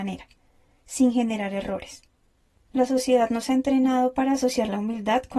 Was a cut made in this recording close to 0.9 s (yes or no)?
no